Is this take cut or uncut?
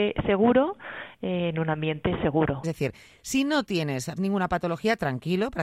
cut